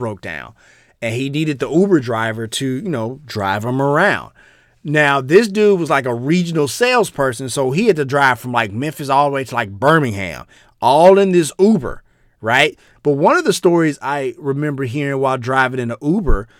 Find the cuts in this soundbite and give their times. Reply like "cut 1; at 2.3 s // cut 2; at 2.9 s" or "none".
cut 1; at 13.0 s